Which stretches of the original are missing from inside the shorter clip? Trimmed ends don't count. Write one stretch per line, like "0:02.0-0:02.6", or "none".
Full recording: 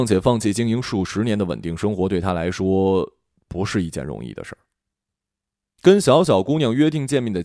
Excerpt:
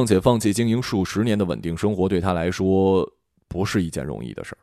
none